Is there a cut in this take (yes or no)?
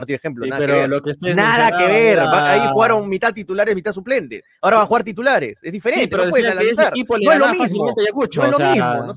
no